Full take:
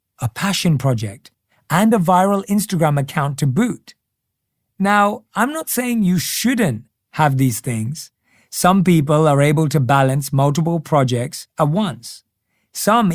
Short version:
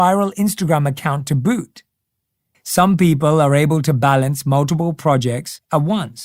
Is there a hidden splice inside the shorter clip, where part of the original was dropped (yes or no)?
yes